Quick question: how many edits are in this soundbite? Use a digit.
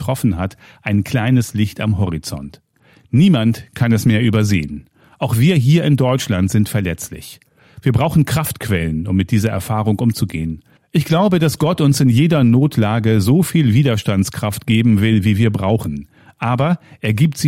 1